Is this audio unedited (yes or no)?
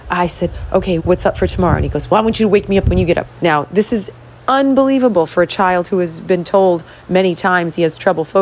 no